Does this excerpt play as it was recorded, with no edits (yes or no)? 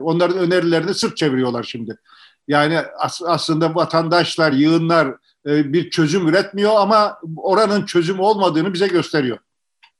yes